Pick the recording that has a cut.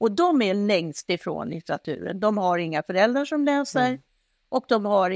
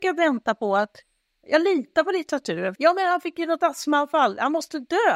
second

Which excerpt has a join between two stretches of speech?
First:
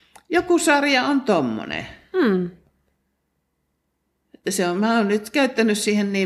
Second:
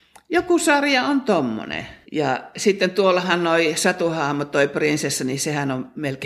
second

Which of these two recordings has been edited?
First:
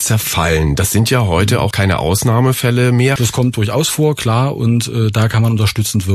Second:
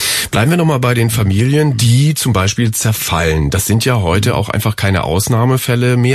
first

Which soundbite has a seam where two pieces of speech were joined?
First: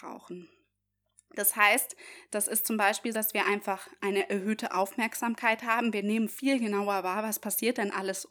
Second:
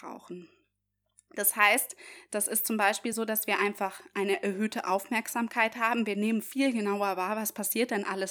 first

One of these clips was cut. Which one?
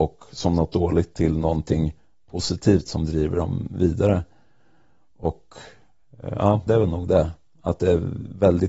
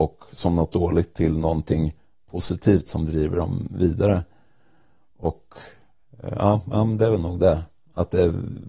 first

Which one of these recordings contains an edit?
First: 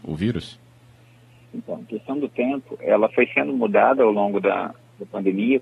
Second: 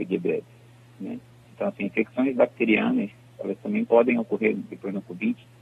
second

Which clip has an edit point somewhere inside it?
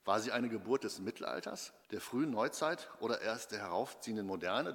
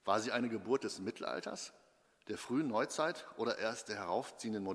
first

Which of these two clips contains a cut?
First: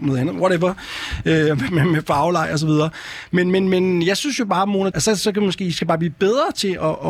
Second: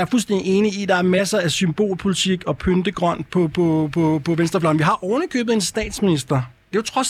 first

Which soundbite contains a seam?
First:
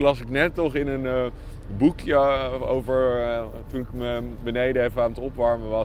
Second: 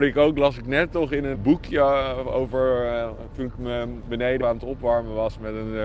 second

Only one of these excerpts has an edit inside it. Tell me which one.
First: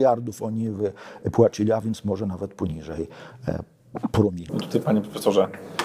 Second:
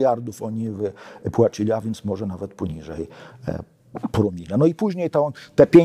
first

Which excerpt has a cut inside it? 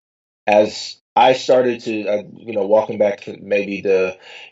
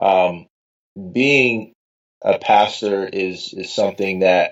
first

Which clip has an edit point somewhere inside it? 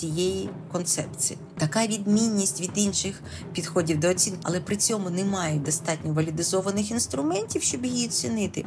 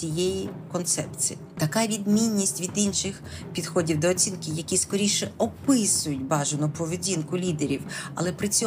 first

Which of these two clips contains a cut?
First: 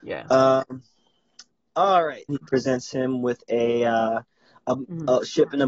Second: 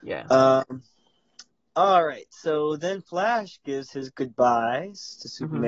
first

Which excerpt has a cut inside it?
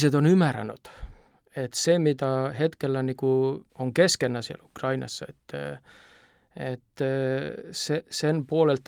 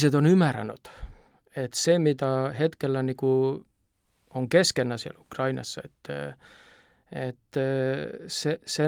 first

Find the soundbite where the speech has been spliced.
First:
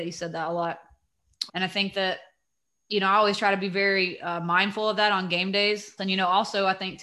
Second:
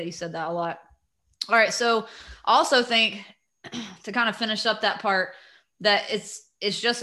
first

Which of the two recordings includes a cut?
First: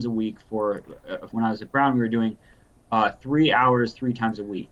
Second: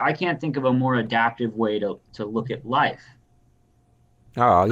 first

